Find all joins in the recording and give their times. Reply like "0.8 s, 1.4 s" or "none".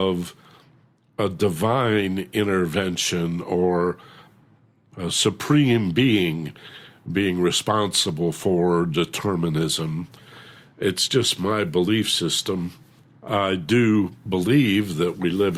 none

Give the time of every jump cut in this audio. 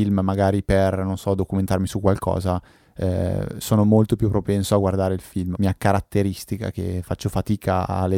5.5 s

